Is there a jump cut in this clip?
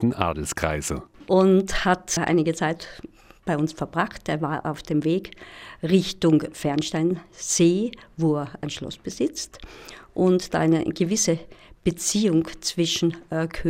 yes; 1 cut; at 1.2 s

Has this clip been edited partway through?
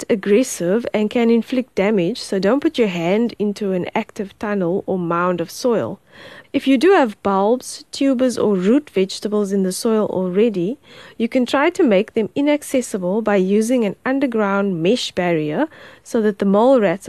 yes; 1 cut; at 6.4 s

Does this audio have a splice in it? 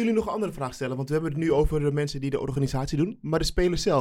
no; 0 cuts

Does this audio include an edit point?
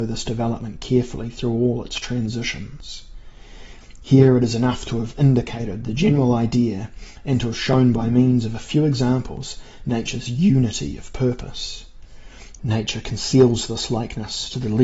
yes; 1 cut; at 12.6 s

